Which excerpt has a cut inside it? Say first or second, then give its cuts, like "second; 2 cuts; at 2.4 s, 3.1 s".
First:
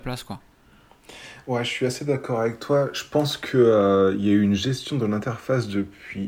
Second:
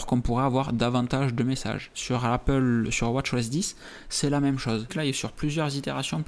second; 2 cuts; at 2.9 s, 4.9 s